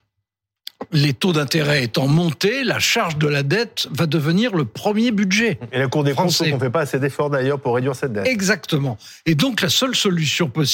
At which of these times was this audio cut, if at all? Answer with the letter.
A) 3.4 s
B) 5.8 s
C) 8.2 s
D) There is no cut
D